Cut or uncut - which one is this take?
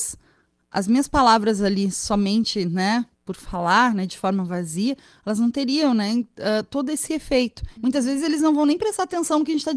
cut